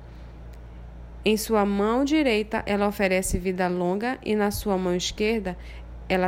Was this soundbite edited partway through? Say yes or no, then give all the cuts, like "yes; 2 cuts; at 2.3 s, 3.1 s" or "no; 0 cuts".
no; 0 cuts